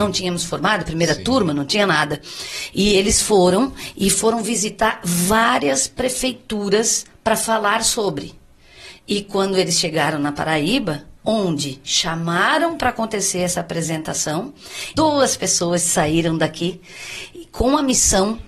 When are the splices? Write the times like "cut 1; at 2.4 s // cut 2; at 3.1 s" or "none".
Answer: cut 1; at 11.2 s // cut 2; at 14.9 s